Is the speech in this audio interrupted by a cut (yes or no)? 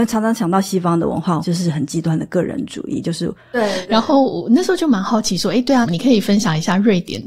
yes